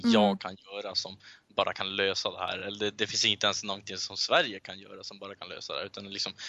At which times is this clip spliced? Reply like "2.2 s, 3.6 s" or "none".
none